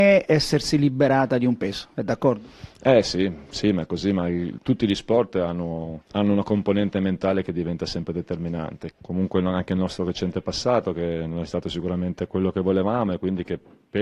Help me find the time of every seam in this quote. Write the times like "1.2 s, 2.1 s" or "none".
8.9 s